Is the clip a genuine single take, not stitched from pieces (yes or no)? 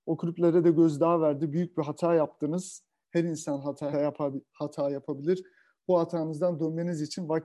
no